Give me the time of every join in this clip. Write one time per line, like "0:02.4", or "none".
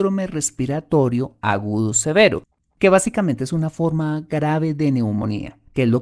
none